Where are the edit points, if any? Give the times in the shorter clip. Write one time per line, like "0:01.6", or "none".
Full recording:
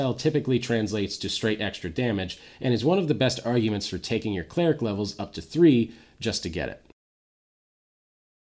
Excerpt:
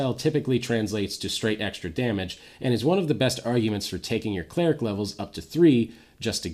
none